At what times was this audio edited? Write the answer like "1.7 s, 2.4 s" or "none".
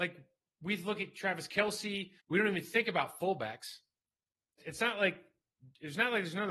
2.2 s, 4.6 s